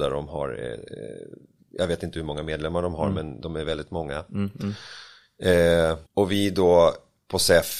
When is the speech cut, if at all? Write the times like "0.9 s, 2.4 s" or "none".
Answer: 6.1 s